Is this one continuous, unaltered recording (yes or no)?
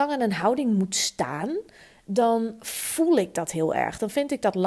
yes